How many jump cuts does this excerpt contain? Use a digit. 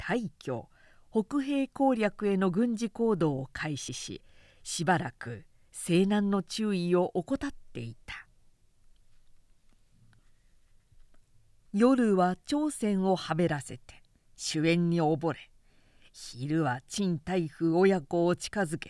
0